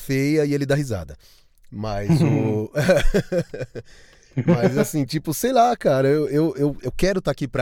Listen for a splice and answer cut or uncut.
uncut